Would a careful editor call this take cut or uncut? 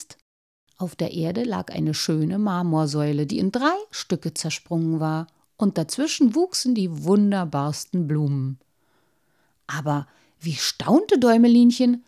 uncut